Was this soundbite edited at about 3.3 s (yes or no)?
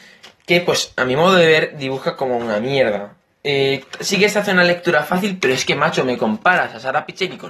no